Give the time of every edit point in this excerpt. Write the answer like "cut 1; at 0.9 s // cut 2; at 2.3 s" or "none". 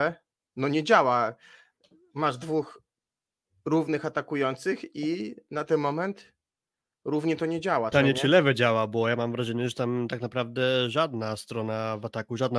cut 1; at 7.9 s